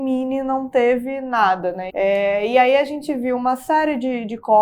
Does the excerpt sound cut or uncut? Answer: cut